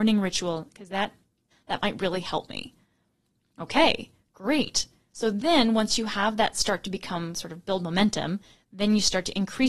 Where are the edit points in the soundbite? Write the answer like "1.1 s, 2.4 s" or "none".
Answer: 1.5 s

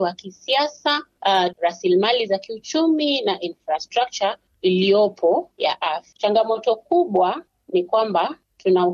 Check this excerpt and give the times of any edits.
1.5 s

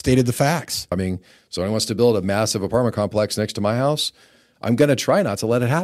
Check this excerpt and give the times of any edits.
0.9 s

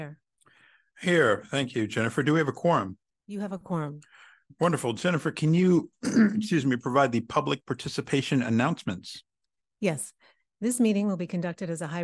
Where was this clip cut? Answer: none

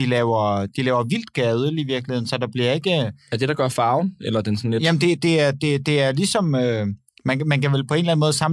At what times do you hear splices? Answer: none

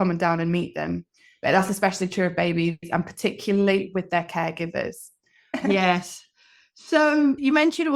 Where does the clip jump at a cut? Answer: none

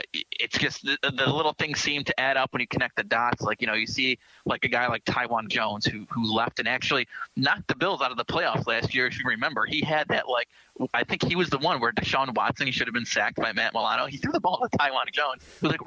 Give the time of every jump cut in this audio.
none

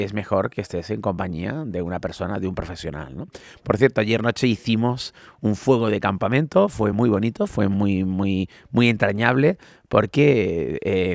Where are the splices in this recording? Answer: none

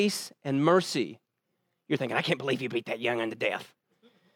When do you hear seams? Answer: none

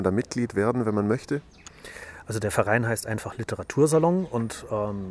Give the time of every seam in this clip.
none

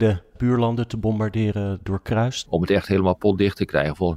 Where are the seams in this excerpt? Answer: 2.4 s

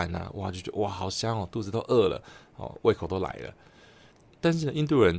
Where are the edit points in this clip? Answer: none

